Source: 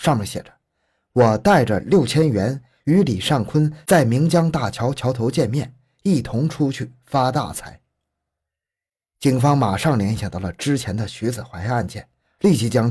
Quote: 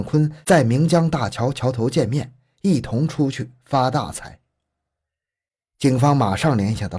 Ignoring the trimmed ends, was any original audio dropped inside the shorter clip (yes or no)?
no